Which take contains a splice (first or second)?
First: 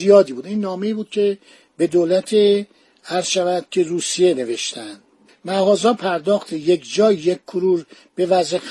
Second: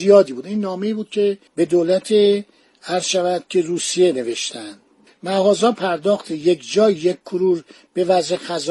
second